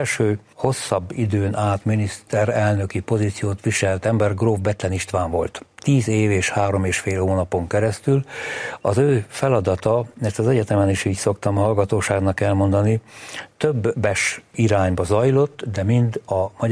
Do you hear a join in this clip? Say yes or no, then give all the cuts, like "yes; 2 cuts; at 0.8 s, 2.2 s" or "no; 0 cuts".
no; 0 cuts